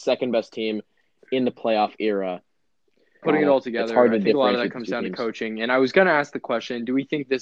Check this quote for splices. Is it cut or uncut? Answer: cut